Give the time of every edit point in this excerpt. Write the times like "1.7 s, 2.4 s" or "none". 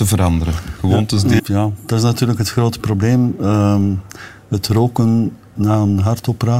1.4 s, 5.6 s